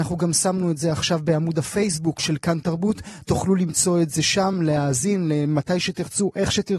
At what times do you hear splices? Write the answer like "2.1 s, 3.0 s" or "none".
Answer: none